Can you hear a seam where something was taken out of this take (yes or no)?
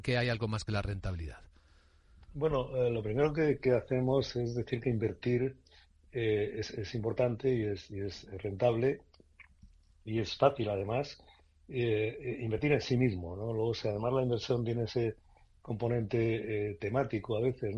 no